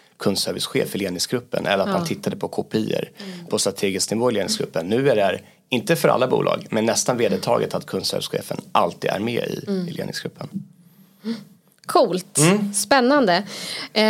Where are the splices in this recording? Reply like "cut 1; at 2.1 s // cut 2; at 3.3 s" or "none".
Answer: none